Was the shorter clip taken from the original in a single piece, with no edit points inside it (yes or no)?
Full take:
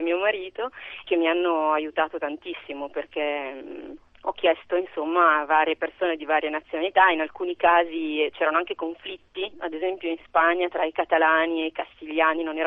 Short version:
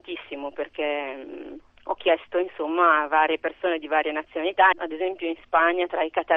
no